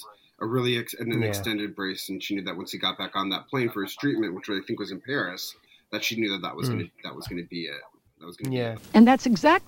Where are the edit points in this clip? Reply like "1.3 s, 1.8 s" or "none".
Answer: 8.8 s